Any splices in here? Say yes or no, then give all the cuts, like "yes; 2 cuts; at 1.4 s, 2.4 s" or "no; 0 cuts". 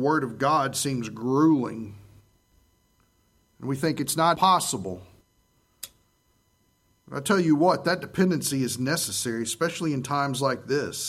yes; 1 cut; at 4.3 s